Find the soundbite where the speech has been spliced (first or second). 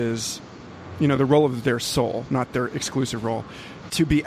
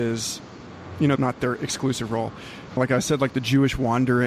second